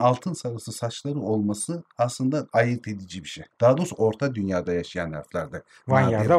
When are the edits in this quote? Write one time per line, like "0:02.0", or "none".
0:03.5